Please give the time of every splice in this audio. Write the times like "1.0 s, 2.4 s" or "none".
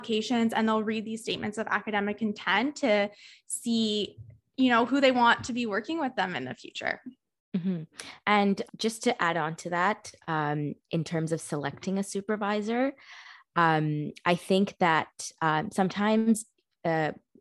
8.7 s